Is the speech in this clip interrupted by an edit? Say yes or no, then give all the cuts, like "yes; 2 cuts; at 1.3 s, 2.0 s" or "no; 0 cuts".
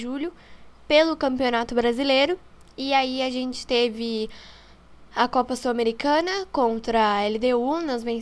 no; 0 cuts